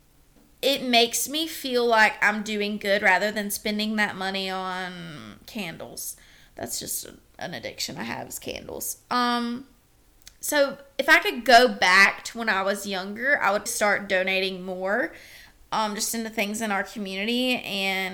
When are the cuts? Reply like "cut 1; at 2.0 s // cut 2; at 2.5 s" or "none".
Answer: cut 1; at 13.7 s